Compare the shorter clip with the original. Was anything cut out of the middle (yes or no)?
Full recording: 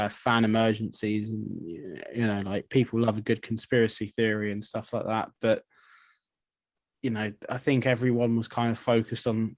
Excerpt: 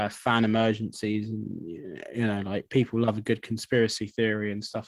no